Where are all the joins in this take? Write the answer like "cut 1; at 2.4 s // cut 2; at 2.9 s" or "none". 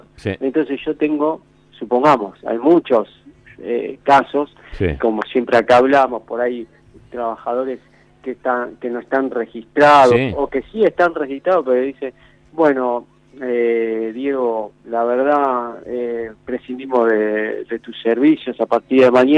none